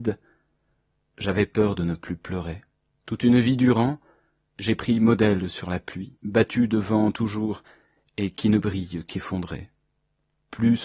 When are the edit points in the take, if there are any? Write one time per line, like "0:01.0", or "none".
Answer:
0:03.0
0:06.2